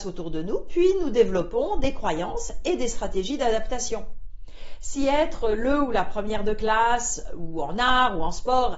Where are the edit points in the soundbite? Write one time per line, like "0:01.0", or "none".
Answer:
none